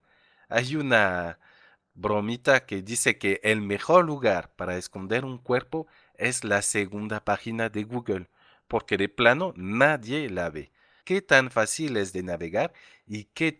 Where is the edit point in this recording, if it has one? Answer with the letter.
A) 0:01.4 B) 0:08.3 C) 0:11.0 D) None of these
C